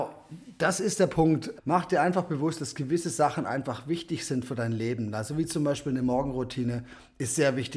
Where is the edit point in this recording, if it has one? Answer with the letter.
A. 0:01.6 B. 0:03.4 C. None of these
A